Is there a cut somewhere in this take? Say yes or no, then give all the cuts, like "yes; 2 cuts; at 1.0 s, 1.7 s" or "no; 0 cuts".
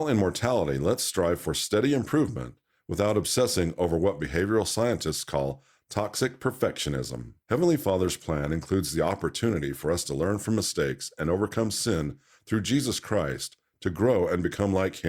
yes; 1 cut; at 7.4 s